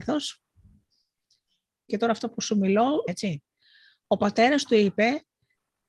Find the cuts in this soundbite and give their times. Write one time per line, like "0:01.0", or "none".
0:01.9
0:03.1